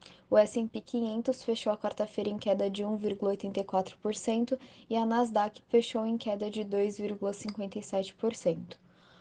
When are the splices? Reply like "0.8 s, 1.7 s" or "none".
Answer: 5.6 s